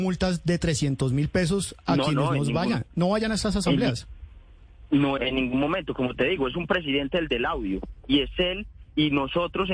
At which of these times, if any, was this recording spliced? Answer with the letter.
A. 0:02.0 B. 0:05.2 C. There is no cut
B